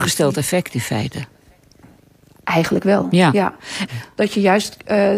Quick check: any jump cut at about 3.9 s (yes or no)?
yes